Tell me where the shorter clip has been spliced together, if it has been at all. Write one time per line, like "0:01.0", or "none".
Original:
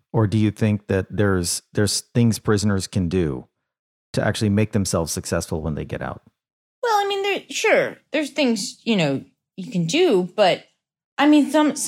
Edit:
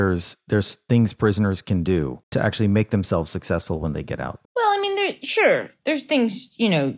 0:02.2
0:04.5